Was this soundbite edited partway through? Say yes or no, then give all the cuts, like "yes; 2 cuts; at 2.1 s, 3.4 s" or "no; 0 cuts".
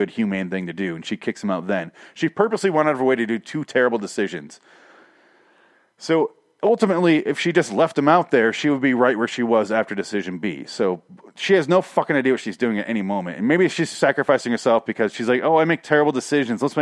no; 0 cuts